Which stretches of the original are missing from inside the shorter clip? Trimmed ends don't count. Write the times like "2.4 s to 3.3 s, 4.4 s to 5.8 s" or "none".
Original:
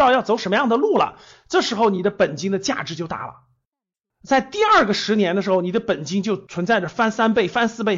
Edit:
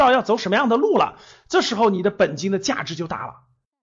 none